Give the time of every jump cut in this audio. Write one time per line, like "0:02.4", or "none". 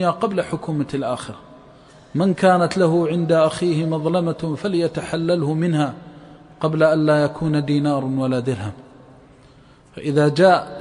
none